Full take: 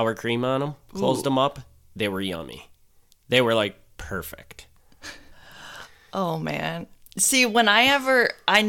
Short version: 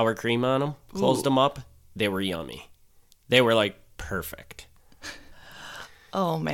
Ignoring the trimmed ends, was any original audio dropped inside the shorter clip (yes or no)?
no